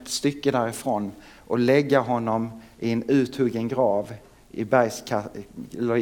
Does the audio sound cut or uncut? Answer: uncut